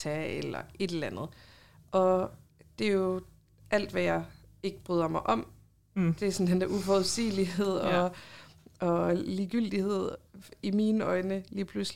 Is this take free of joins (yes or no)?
yes